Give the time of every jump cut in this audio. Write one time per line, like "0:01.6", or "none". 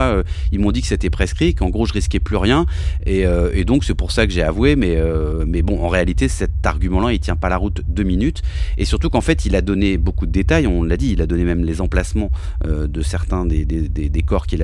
none

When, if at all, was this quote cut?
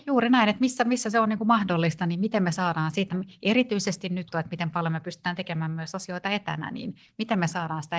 0:03.1
0:04.3

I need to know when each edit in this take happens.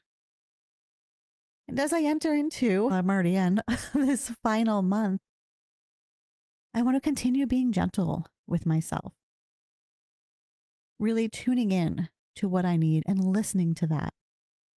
0:02.9

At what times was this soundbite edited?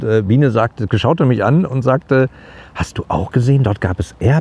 none

